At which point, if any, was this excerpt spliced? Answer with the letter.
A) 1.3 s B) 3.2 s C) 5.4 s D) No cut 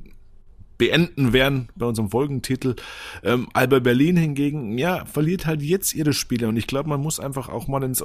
D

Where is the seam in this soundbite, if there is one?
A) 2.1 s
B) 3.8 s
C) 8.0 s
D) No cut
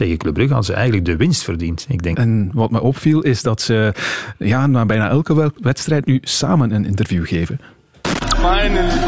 A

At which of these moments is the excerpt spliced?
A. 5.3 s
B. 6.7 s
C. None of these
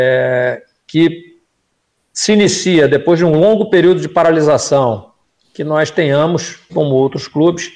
B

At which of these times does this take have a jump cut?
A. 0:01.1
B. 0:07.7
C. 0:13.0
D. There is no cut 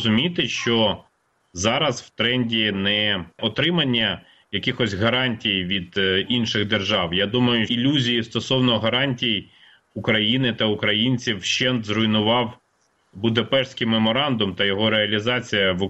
B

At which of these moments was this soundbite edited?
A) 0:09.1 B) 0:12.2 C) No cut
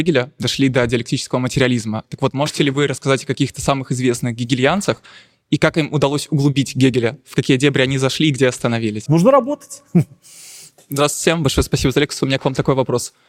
A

